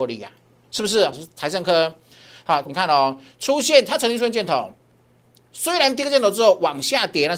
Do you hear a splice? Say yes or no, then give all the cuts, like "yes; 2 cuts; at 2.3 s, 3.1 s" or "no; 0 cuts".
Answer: yes; 2 cuts; at 1.1 s, 2.6 s